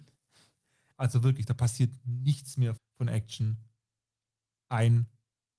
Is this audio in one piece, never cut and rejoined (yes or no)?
no